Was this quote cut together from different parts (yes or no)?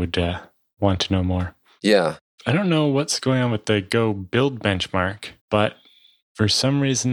yes